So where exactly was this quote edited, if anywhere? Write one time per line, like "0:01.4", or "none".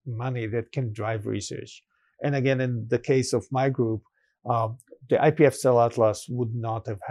0:02.1